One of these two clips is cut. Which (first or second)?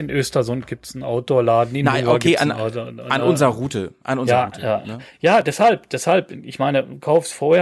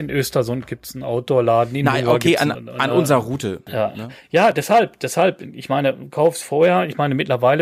second